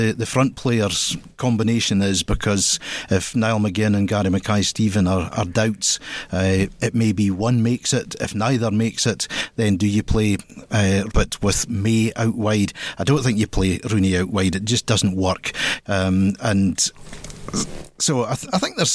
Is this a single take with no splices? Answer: no; 2 cuts; at 11.1 s, 15.8 s

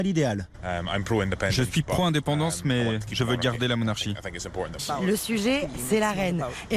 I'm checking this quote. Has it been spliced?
yes; 1 cut; at 4.8 s

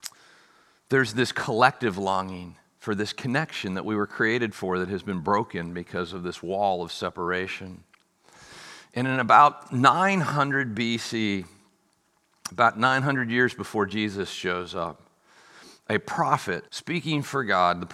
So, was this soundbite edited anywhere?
yes; 1 cut; at 16.7 s

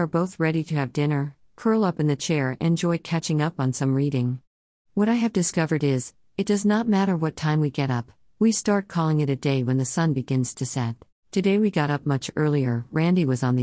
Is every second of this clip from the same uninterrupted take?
no; 2 cuts; at 6.2 s, 11.1 s

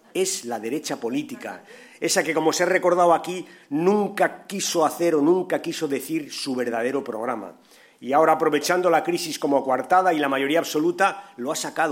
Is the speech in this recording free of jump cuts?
yes; 0 cuts

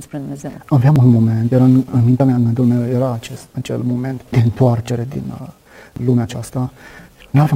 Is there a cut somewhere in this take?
no; 0 cuts

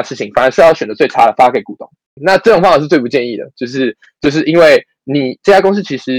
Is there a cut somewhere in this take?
yes; 1 cut; at 2.2 s

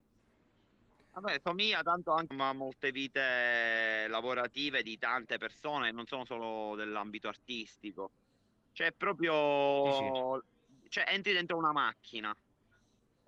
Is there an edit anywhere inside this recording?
yes; 1 cut; at 2.3 s

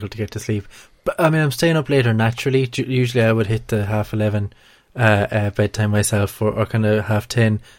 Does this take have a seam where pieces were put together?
no; 0 cuts

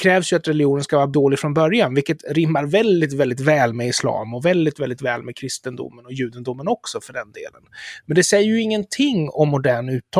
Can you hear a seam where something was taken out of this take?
no; 0 cuts

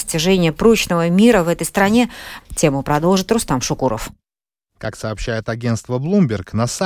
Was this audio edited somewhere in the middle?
yes; 1 cut; at 2.4 s

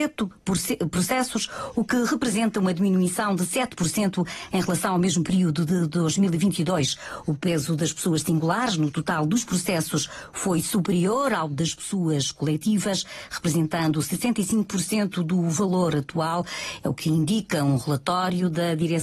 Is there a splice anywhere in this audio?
no; 0 cuts

